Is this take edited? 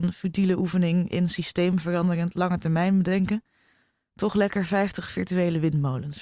no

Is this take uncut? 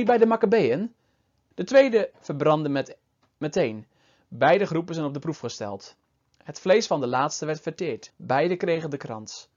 no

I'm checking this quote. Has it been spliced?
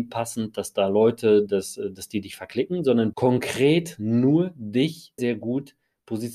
yes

